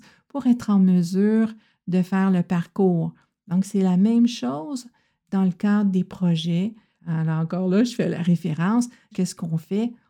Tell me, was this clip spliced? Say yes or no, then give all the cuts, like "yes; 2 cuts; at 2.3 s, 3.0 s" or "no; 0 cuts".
yes; 2 cuts; at 7.0 s, 9.1 s